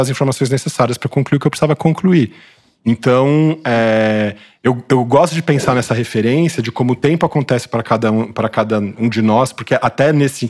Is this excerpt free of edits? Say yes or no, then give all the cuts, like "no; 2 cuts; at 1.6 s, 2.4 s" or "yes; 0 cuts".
yes; 0 cuts